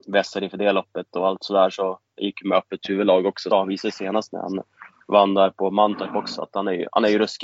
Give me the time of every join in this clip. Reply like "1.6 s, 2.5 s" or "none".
3.5 s